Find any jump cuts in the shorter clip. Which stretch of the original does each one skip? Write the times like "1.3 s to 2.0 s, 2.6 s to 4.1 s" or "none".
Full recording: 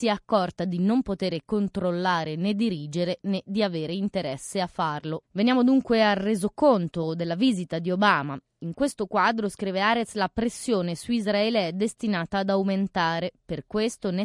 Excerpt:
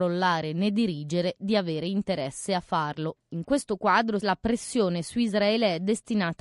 3.2 s to 3.4 s, 5.3 s to 8.5 s, 9.5 s to 10.1 s